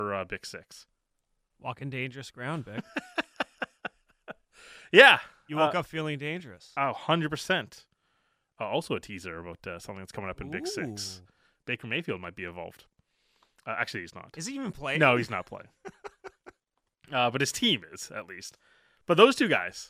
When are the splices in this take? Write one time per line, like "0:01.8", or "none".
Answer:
none